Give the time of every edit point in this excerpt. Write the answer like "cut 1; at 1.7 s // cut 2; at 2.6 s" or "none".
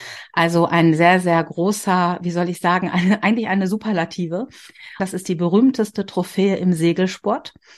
cut 1; at 5.0 s